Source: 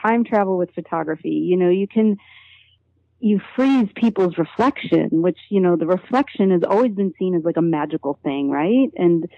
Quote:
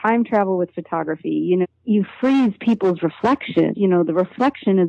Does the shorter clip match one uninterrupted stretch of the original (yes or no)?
no